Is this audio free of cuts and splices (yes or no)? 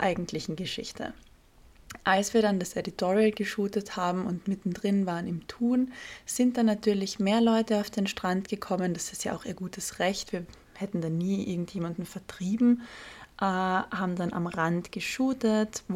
yes